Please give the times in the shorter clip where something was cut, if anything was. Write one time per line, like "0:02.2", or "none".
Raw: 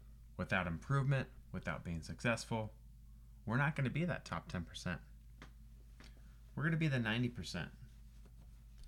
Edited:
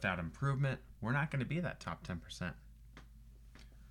0:01.0